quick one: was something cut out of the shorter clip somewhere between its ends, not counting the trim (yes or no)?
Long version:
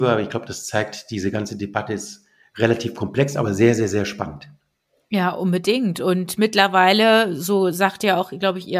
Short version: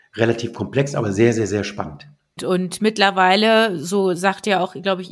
yes